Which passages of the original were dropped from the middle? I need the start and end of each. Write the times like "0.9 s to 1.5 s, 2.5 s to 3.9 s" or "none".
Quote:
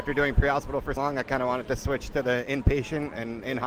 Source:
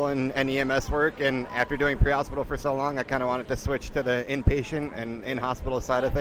2.6 s to 2.8 s